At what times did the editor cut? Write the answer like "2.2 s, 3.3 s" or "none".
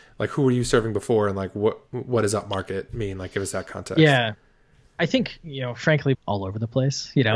6.1 s